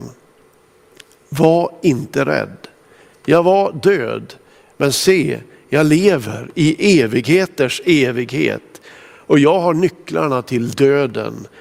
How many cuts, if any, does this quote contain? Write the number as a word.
one